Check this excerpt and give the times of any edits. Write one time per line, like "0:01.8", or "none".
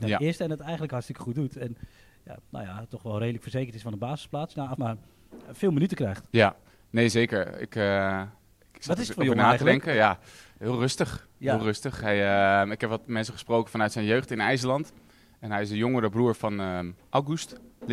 0:04.7